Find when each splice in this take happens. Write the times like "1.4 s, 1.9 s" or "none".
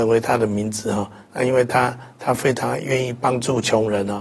none